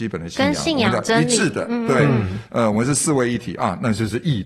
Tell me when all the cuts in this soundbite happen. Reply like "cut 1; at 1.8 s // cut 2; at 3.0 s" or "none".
cut 1; at 2.5 s